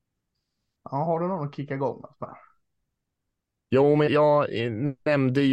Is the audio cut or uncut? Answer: cut